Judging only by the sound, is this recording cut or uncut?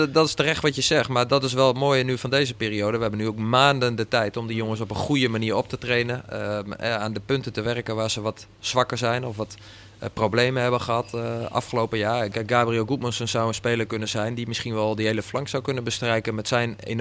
cut